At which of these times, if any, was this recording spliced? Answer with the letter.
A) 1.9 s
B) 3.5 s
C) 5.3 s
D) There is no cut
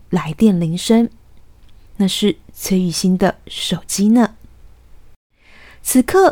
A